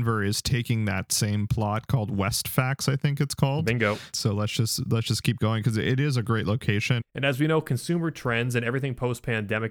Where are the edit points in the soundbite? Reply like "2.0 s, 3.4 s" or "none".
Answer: 4.1 s, 7.0 s